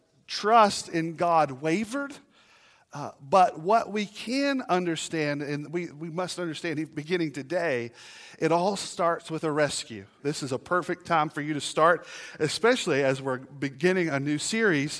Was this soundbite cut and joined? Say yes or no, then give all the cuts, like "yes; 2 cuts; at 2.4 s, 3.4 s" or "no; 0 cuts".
yes; 1 cut; at 10.2 s